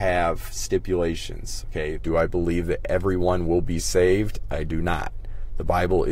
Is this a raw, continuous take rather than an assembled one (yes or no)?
no